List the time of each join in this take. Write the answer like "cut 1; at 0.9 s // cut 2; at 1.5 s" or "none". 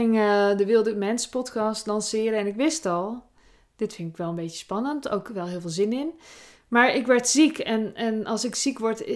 none